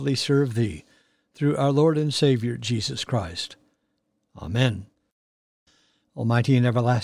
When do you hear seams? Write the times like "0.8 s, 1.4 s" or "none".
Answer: 6.0 s